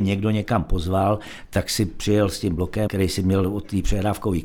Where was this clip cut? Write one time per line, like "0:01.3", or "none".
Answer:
0:02.9